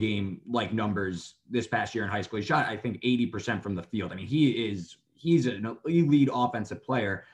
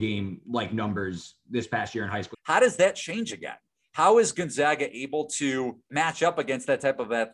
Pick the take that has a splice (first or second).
second